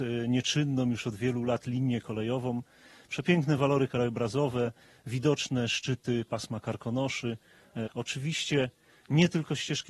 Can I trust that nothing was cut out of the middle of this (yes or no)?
no